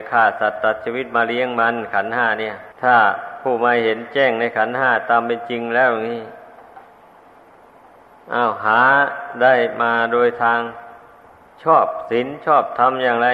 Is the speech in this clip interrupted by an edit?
yes; 1 cut; at 2.7 s

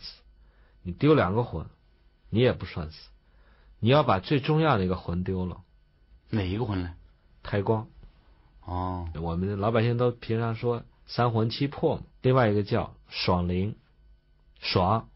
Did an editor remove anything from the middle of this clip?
yes; 2 cuts; at 9.1 s, 12.1 s

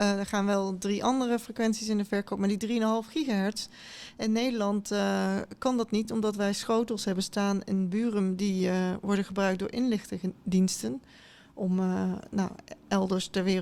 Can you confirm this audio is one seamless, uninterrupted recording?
yes; 0 cuts

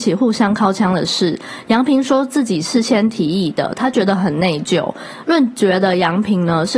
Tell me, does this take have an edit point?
no; 0 cuts

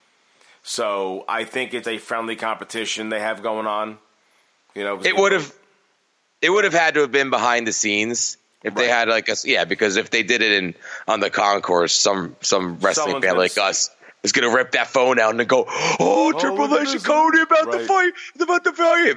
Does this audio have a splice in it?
yes; 1 cut; at 1.8 s

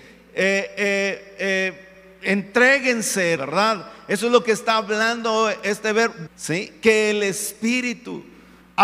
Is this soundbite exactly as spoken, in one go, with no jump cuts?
no; 2 cuts; at 3.4 s, 6.3 s

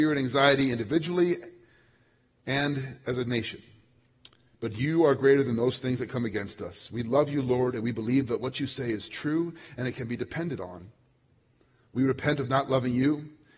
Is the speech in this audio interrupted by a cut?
no; 0 cuts

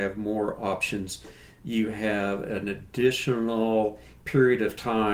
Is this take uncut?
yes; 0 cuts

